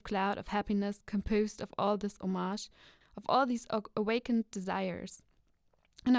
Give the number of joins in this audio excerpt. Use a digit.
1